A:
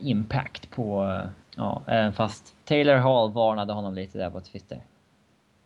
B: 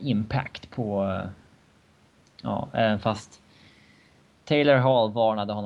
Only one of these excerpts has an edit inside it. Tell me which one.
A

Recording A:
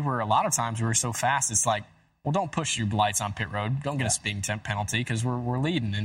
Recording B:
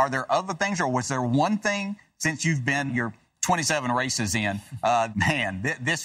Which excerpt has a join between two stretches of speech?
B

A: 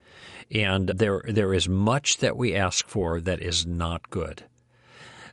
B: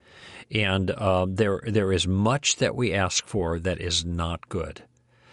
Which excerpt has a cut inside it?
A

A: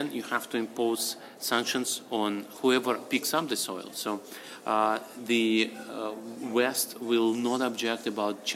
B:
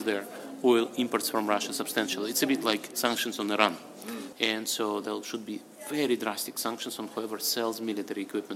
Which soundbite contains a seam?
B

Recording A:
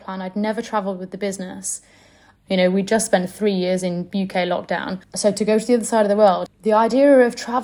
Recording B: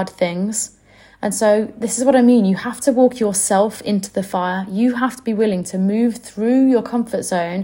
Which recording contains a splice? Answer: A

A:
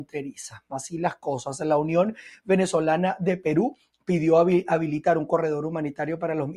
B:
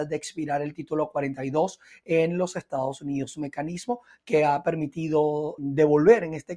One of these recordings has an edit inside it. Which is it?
B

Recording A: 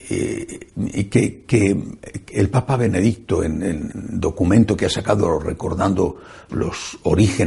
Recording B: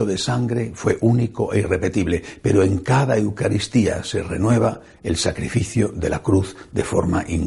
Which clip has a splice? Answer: A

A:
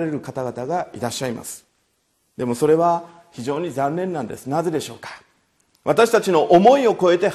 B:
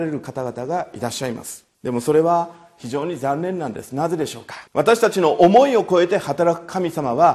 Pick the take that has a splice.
B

